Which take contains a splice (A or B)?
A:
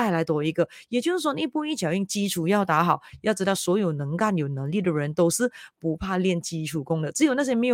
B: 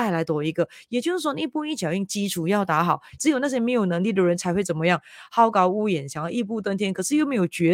B